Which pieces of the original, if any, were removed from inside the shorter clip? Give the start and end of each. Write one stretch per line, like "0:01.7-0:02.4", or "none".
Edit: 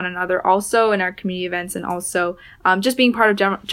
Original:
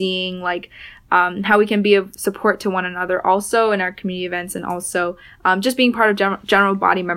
none